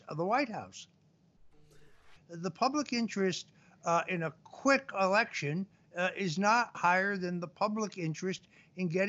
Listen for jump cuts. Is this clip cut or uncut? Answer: cut